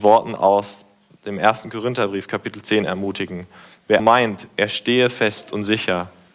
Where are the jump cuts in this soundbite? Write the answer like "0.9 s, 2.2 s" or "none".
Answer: 4.0 s

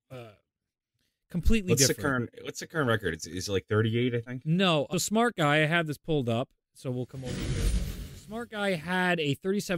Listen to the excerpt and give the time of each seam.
4.9 s

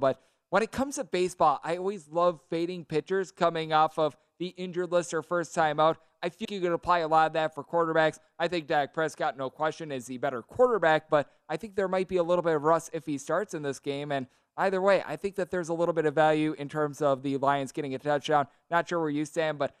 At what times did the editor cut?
6.4 s

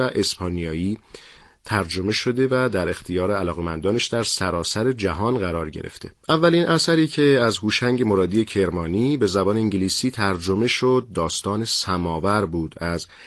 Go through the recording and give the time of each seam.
none

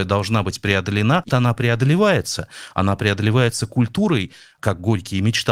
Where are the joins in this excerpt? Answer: 1.3 s

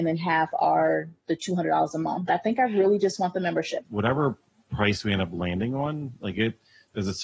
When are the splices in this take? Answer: 2.3 s, 3.8 s

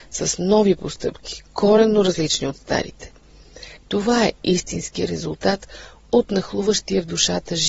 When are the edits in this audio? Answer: 3.8 s

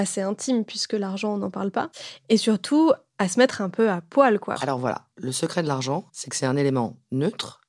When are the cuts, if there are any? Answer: 4.6 s, 6.1 s

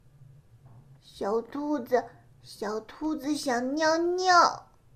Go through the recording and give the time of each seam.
1.0 s

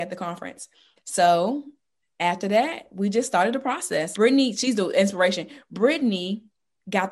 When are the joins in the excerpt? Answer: 1.0 s, 4.1 s

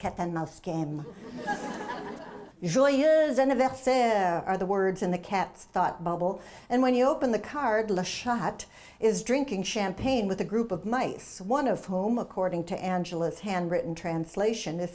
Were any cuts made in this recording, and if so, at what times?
2.5 s

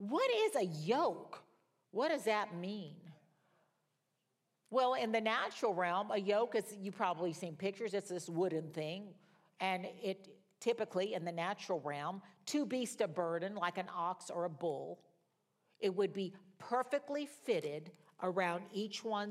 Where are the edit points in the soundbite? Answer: none

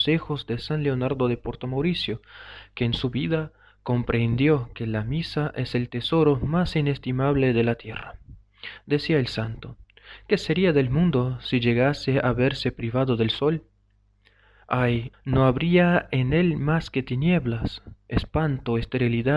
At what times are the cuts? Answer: 15.1 s

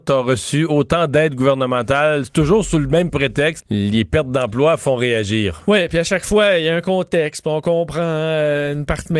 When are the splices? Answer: 3.6 s

